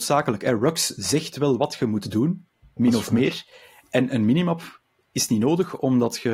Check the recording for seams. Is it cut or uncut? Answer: cut